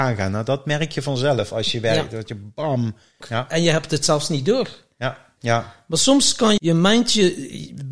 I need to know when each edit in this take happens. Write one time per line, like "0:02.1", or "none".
0:03.2
0:05.4
0:06.6